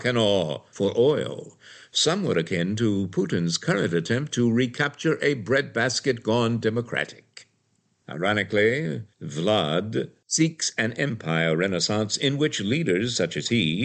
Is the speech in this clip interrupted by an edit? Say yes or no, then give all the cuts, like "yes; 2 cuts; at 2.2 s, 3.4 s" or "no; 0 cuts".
no; 0 cuts